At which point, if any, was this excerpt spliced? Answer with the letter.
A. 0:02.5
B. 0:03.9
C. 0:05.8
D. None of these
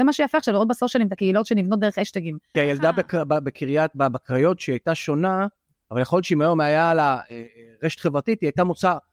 A